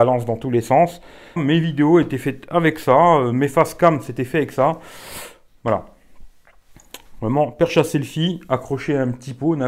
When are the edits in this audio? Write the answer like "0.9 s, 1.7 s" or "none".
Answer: 1.4 s